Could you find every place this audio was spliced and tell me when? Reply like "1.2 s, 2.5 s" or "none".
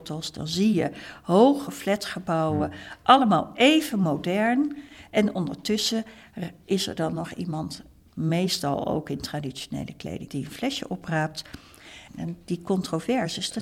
10.3 s, 12.1 s